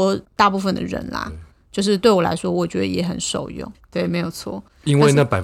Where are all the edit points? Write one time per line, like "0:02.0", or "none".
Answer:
0:03.7